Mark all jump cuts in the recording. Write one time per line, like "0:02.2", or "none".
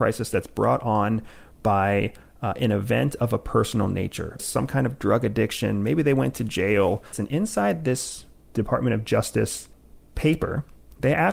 0:04.4
0:07.1